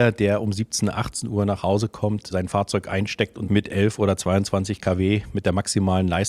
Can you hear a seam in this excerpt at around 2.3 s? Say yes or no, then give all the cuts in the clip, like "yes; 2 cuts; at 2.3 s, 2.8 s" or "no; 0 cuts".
yes; 1 cut; at 2.3 s